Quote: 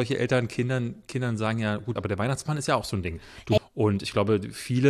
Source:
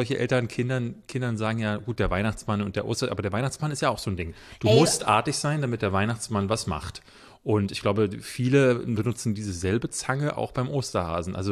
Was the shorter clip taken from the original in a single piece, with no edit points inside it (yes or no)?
no